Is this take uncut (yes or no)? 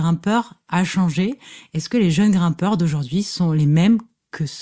yes